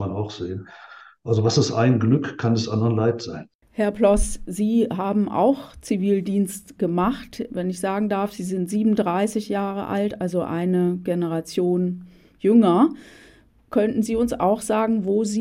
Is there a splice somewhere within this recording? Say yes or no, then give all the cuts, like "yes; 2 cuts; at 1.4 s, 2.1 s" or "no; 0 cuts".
no; 0 cuts